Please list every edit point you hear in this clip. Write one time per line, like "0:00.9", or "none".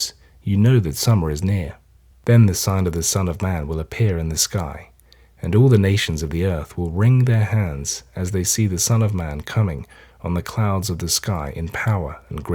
0:02.1